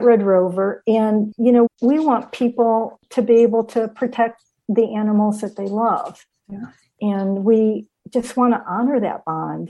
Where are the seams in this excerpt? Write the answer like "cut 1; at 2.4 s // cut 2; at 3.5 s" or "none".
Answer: cut 1; at 1.7 s